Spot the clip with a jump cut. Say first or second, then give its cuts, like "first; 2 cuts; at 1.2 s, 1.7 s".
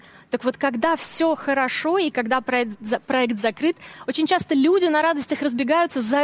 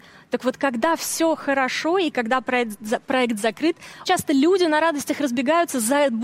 second; 1 cut; at 4.1 s